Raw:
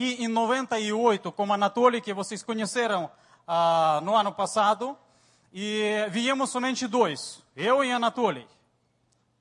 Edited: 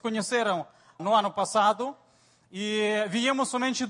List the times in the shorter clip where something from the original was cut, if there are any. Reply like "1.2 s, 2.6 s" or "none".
1.0 s